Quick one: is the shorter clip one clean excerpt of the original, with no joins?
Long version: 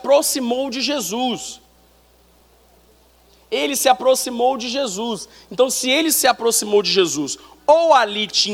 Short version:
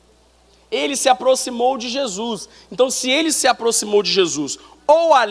yes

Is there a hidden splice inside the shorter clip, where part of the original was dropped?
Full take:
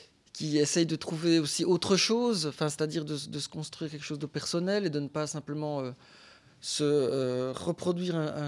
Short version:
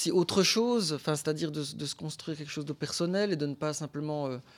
no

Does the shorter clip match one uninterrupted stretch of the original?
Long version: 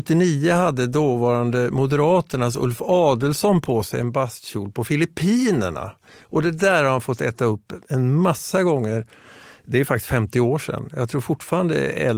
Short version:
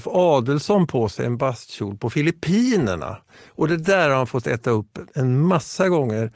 yes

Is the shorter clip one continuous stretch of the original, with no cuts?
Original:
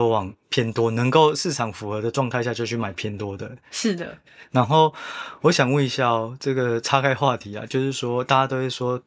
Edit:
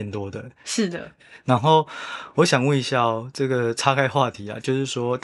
yes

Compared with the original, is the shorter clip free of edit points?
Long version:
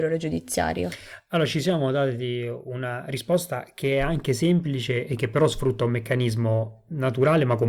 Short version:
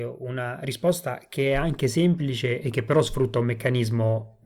yes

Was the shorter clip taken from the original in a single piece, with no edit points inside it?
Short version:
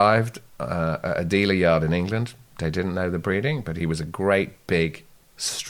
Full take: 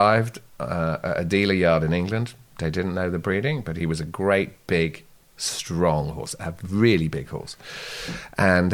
yes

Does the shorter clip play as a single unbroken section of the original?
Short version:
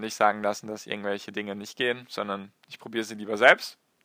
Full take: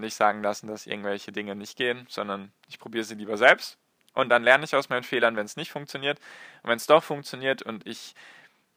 yes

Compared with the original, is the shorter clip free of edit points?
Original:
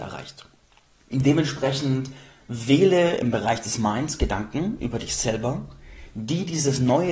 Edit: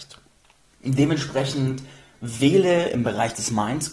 yes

